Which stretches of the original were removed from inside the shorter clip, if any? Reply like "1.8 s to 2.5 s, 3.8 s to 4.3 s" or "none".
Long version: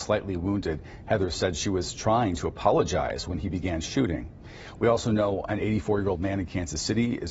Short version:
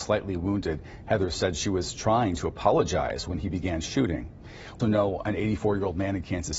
4.8 s to 5.0 s